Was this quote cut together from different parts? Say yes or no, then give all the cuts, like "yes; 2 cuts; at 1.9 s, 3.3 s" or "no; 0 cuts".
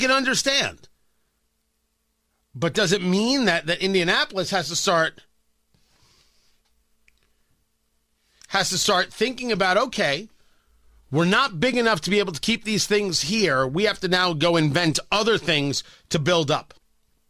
no; 0 cuts